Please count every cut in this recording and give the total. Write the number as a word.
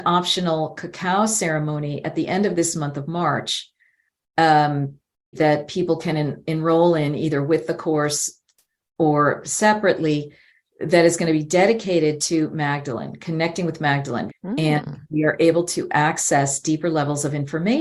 two